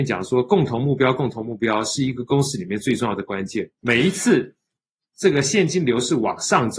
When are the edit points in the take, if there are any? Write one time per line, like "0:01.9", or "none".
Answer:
0:03.8